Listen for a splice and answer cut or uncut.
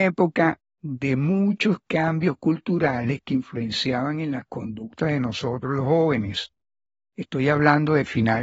uncut